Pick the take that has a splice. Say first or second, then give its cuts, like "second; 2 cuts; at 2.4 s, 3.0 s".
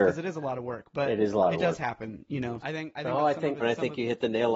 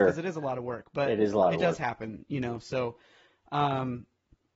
first; 2 cuts; at 2.6 s, 3.6 s